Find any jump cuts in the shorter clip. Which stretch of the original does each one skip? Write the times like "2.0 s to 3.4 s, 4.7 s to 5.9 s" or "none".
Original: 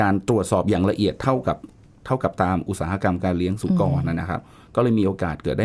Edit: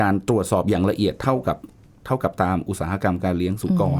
none